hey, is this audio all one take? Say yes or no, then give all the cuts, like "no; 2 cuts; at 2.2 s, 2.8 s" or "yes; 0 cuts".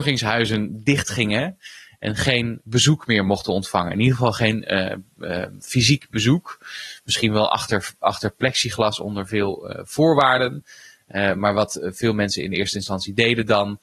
yes; 0 cuts